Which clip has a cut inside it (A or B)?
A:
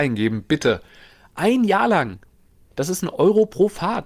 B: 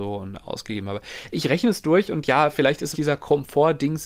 B